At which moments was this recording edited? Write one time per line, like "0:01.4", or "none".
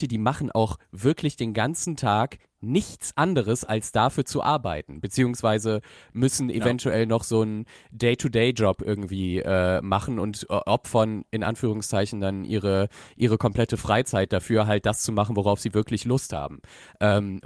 none